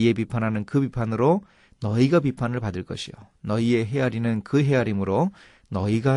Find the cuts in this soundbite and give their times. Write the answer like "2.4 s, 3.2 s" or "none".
none